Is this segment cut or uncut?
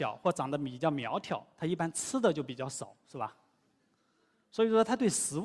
uncut